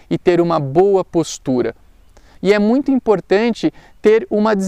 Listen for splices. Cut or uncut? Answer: cut